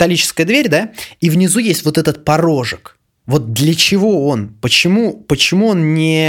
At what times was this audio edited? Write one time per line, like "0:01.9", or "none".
none